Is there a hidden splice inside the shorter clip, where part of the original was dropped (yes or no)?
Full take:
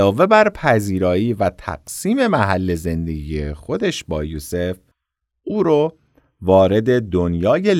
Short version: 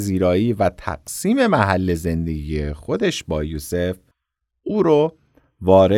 no